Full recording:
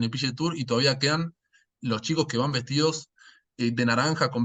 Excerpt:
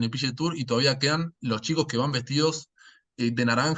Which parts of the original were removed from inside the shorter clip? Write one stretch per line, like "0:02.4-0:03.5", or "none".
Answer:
0:01.4-0:01.8